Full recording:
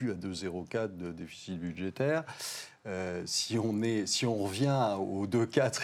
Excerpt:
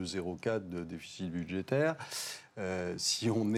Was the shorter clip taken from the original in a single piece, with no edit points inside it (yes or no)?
yes